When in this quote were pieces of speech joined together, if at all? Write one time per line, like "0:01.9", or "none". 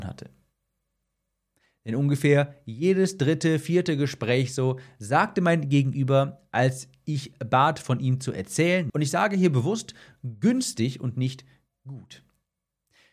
0:08.9